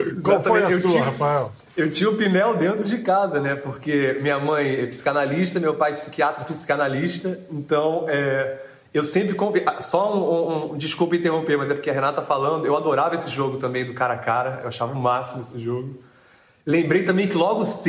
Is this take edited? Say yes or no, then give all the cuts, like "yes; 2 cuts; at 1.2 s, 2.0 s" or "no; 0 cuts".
no; 0 cuts